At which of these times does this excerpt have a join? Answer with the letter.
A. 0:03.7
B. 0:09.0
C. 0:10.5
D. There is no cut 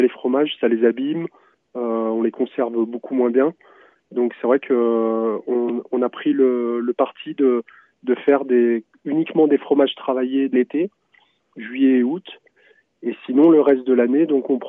C